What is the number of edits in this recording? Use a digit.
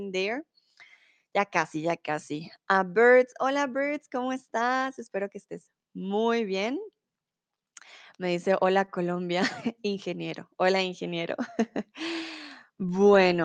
0